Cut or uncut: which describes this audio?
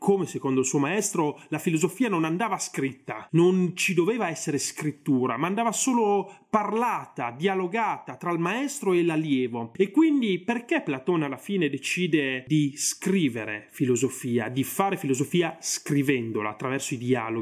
uncut